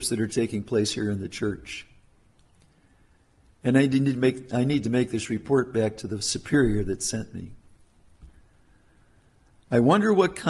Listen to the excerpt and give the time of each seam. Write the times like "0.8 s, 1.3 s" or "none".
none